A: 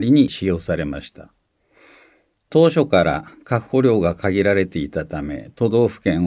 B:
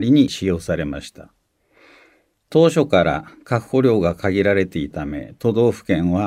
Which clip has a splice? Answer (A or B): B